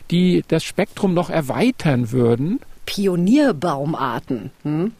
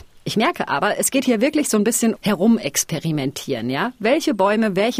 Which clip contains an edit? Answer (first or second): second